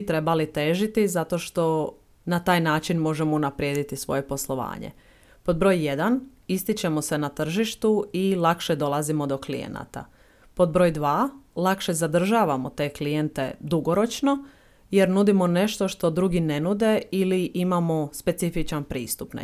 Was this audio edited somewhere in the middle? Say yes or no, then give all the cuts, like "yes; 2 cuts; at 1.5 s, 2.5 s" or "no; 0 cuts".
no; 0 cuts